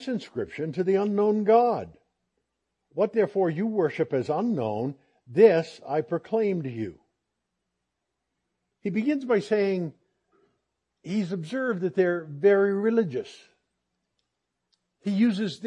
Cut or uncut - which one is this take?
uncut